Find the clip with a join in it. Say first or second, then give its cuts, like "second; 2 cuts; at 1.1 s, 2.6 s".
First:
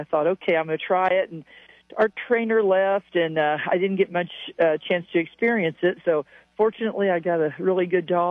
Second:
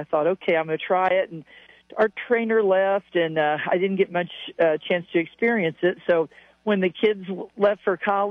first; 1 cut; at 6.0 s